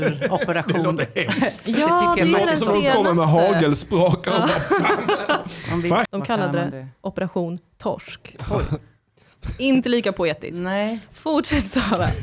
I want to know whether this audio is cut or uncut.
cut